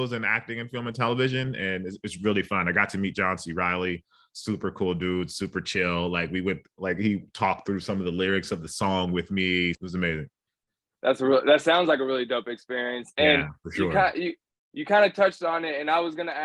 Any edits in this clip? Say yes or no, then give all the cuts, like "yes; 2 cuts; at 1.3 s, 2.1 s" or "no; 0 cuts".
yes; 1 cut; at 9.7 s